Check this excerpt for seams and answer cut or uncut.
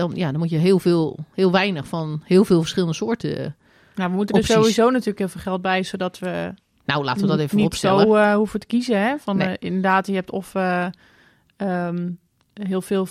uncut